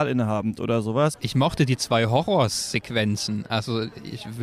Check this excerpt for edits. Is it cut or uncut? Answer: cut